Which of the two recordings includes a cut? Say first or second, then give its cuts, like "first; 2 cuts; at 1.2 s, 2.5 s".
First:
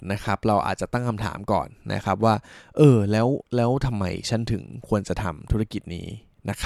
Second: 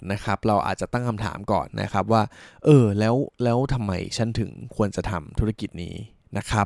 second; 1 cut; at 1.7 s